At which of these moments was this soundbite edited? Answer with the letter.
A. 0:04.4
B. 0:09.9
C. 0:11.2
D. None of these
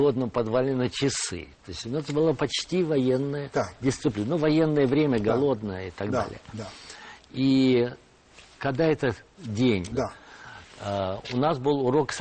B